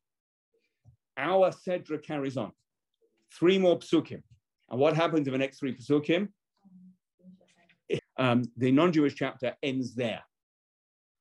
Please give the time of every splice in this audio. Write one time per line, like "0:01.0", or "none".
0:08.0